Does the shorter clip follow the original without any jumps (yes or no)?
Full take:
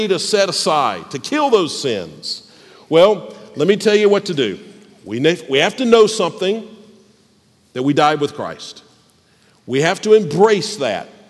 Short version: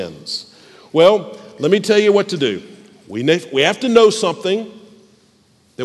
yes